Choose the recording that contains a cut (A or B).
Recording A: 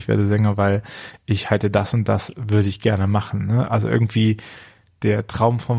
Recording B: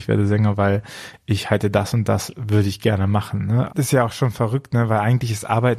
B